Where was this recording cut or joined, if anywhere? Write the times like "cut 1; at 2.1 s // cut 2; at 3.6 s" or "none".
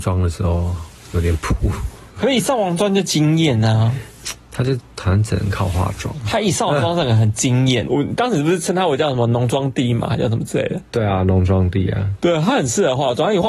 cut 1; at 7.9 s